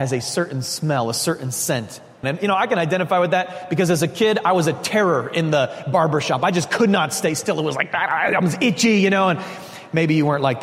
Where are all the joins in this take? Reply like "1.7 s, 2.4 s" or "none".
2.2 s